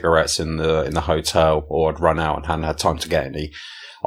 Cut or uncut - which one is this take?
uncut